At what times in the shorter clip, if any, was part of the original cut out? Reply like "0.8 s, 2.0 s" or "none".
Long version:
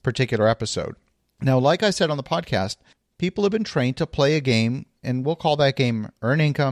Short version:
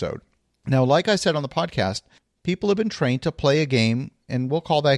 none